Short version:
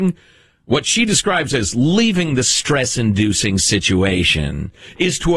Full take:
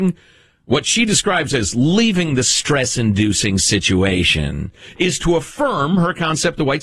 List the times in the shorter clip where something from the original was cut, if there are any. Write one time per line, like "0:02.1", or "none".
none